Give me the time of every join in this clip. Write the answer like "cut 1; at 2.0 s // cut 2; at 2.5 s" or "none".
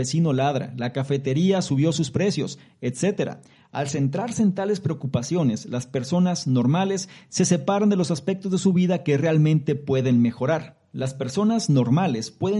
cut 1; at 10.9 s